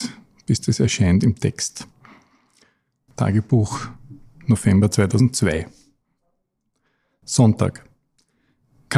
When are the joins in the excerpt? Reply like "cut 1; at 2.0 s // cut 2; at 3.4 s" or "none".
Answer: cut 1; at 3.1 s